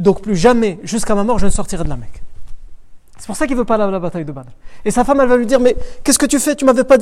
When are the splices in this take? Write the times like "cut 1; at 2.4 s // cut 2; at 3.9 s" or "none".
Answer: none